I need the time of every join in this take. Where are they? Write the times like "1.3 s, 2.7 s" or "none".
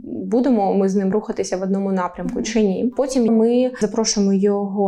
1.1 s, 3.3 s